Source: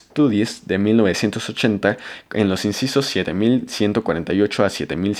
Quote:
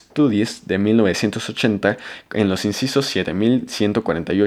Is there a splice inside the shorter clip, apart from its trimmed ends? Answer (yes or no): no